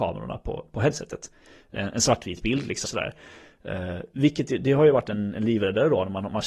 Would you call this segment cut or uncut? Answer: cut